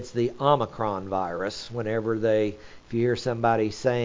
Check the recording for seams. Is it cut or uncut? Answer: uncut